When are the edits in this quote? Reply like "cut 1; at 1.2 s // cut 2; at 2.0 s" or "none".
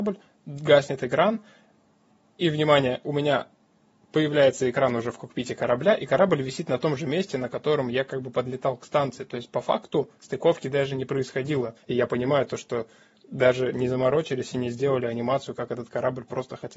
cut 1; at 11.8 s